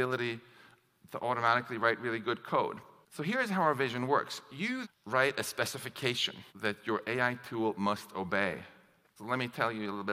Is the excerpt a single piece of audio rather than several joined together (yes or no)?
no